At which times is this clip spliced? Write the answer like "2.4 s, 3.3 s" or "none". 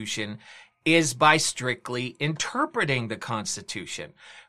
none